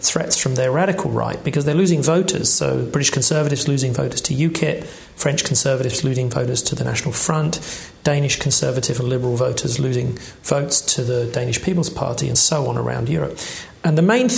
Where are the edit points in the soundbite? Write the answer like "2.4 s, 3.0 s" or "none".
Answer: none